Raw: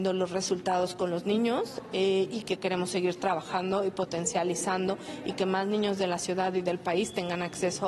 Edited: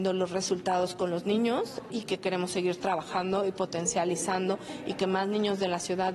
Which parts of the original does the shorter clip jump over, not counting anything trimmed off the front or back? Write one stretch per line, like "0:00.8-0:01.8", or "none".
0:01.9-0:02.3